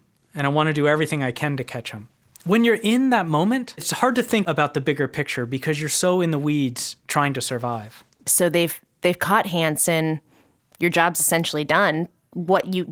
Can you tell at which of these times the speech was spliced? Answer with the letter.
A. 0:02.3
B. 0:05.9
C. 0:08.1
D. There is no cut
D